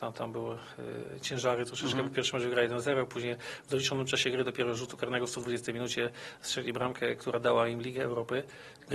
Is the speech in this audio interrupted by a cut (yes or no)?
no